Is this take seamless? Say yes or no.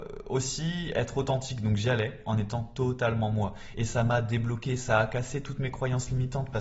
no